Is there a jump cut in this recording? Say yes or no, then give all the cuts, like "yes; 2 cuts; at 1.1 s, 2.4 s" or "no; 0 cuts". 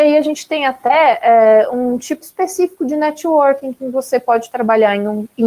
yes; 1 cut; at 2.2 s